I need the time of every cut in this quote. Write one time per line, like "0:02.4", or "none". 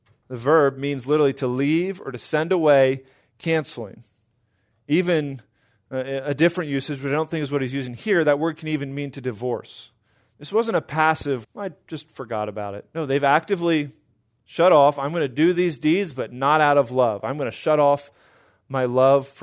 0:11.4